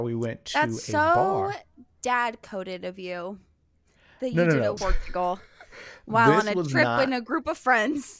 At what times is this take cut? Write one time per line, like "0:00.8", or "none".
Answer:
0:04.8